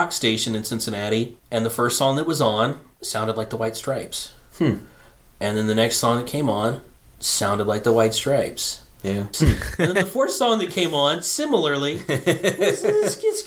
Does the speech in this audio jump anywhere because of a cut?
yes; 1 cut; at 9.3 s

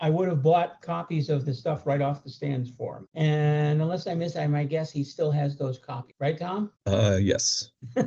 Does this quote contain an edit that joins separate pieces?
no; 0 cuts

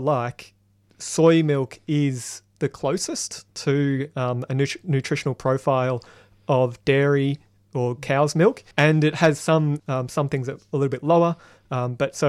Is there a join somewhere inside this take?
yes; 2 cuts; at 8.7 s, 9.8 s

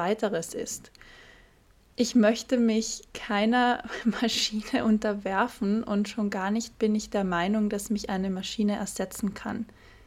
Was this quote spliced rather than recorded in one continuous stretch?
no; 0 cuts

